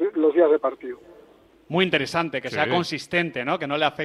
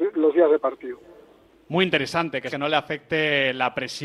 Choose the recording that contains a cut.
second; 1 cut; at 2.5 s

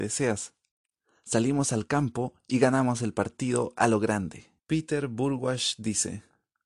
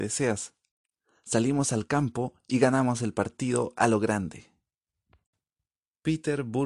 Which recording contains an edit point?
first; 1 cut; at 4.6 s

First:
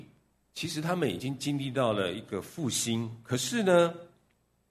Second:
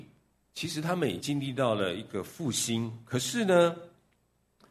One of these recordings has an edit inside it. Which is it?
second; 1 cut; at 1.2 s

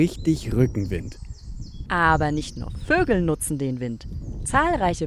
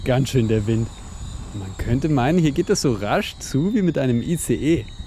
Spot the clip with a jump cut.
first; 1 cut; at 1.9 s

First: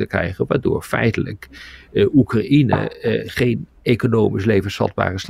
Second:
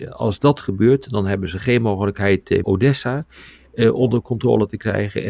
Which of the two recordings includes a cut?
second; 1 cut; at 2.6 s

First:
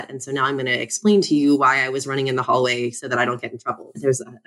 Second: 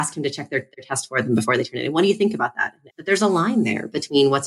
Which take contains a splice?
second; 1 cut; at 2.9 s

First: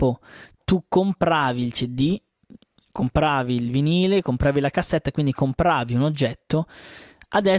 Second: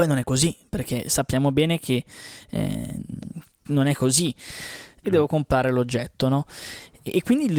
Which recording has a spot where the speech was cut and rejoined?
second; 1 cut; at 5.0 s

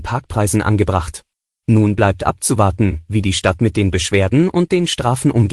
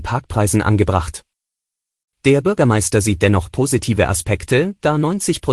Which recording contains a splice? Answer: first; 1 cut; at 1.6 s

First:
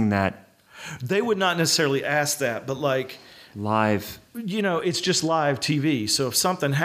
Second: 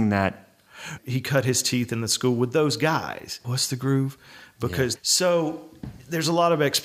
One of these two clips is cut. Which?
second; 3 cuts; at 1.0 s, 3.4 s, 5.0 s

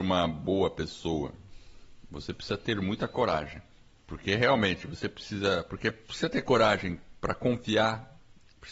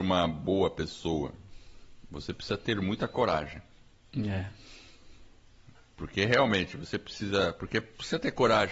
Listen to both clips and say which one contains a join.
first; 1 cut; at 4.0 s

